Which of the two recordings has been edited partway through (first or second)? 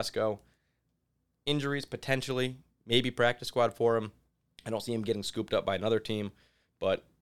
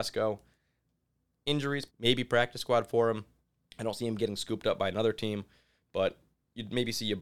second